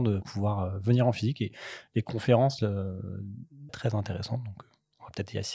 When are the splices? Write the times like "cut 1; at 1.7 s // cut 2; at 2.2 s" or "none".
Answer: cut 1; at 3.7 s

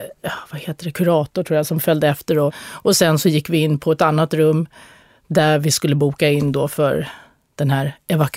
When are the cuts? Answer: cut 1; at 2.5 s

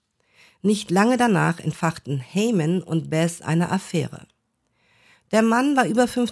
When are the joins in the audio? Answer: none

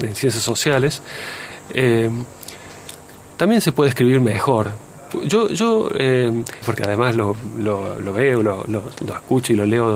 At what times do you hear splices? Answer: cut 1; at 6.6 s

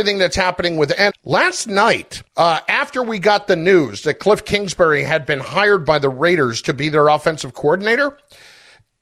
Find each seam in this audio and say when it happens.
cut 1; at 1.1 s // cut 2; at 2.3 s

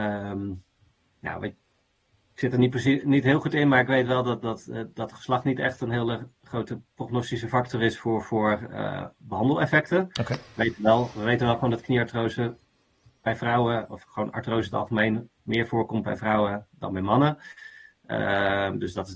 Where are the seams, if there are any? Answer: none

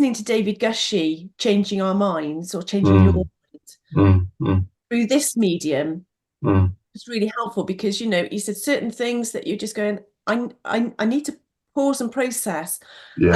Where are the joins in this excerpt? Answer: none

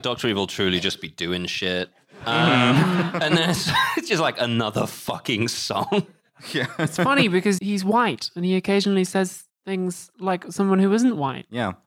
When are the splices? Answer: cut 1; at 7.6 s

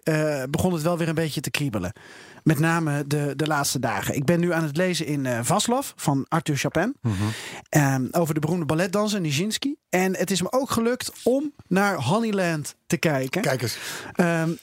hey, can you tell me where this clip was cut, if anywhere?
none

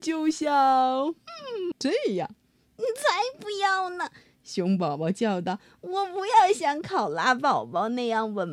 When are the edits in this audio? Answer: cut 1; at 1.7 s

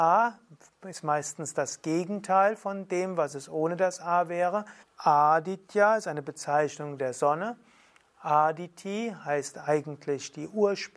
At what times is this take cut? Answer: cut 1; at 4.8 s

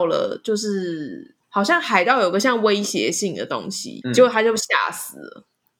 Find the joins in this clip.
cut 1; at 1.4 s // cut 2; at 4.0 s

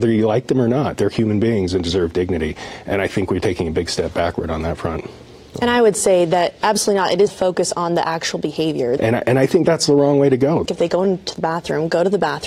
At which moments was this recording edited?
cut 1; at 7.3 s // cut 2; at 9.0 s // cut 3; at 10.7 s

